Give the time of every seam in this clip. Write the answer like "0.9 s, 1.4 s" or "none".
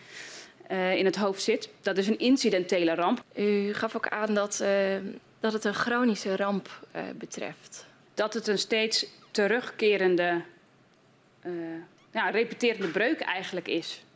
3.2 s, 8.1 s